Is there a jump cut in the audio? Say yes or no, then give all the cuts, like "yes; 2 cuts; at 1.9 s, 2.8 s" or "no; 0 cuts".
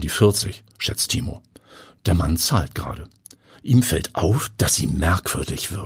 yes; 1 cut; at 3.6 s